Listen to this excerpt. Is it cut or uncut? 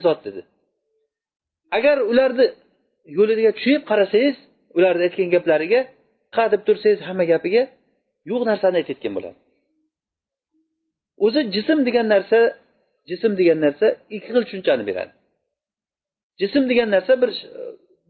cut